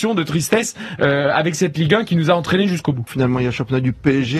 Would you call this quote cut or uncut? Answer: cut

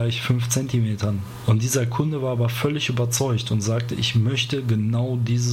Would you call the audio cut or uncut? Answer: cut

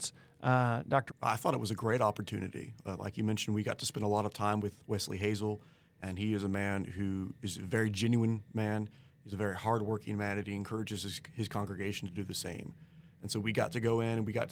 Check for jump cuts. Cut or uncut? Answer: cut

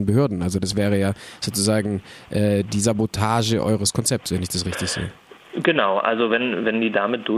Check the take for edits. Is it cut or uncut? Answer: uncut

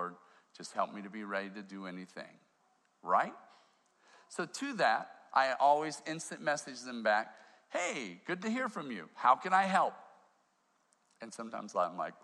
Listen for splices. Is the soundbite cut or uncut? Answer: uncut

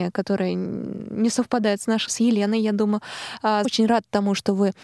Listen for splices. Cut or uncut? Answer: cut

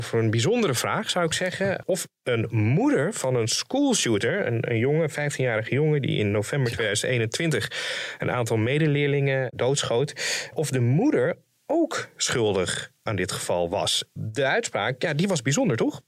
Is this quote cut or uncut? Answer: uncut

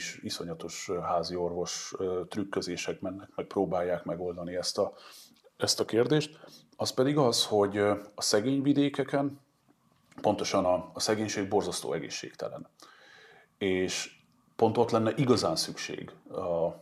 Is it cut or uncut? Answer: uncut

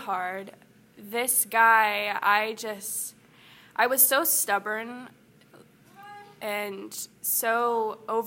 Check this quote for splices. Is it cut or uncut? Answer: uncut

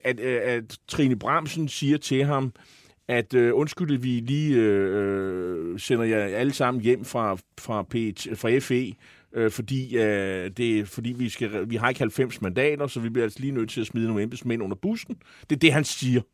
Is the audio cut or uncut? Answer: uncut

